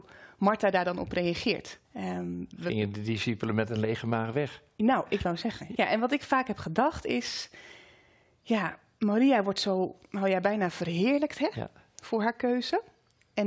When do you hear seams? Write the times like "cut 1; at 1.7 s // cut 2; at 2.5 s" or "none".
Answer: cut 1; at 1.8 s // cut 2; at 5.7 s